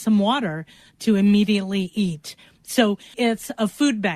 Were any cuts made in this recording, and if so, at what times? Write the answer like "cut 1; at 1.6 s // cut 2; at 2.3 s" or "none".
cut 1; at 3.1 s